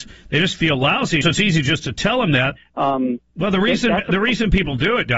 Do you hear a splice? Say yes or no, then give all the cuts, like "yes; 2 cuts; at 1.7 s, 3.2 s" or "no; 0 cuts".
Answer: yes; 2 cuts; at 1.2 s, 2.6 s